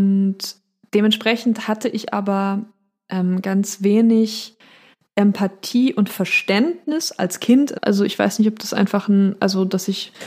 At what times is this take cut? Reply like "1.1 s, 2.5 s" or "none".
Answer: 7.7 s